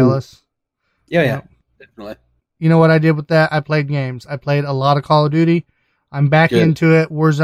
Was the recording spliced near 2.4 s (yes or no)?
yes